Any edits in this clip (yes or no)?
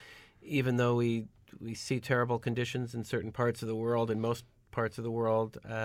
no